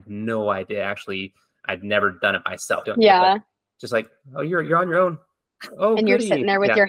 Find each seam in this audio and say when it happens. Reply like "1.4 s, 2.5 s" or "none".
2.8 s